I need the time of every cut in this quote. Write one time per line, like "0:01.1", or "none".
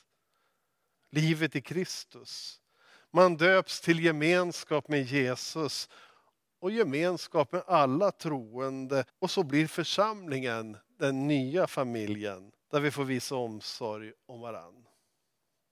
0:00.9
0:09.1
0:12.6